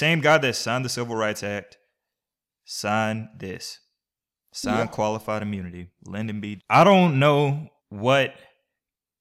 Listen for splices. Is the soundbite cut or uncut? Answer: cut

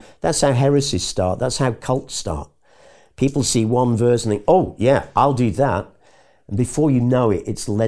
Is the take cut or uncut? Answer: uncut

